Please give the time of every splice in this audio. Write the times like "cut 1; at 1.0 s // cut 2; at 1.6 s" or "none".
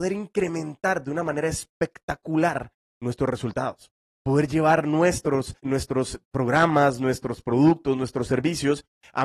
cut 1; at 5.6 s